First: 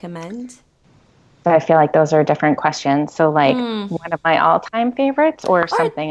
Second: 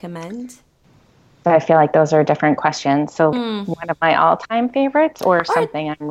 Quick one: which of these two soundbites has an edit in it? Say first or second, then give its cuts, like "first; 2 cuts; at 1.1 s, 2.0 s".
second; 1 cut; at 3.3 s